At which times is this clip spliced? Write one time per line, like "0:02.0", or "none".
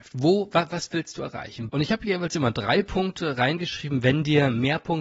0:01.7